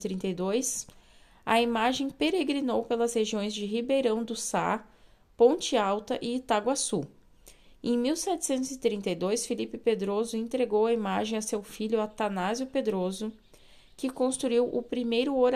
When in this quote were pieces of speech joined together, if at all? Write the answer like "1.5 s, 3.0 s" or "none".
none